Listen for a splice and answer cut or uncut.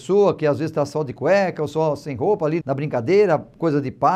cut